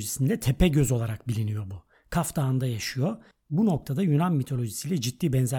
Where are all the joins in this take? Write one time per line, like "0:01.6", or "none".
none